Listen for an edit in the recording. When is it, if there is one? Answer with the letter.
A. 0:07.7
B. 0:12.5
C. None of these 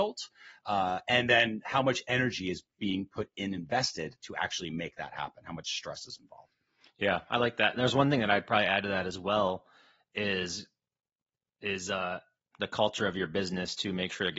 B